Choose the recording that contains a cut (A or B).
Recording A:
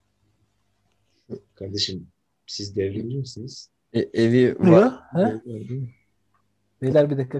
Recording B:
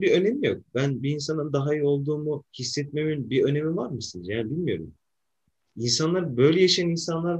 B